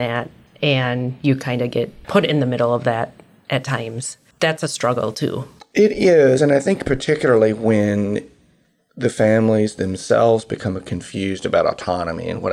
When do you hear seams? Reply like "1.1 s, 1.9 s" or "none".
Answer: none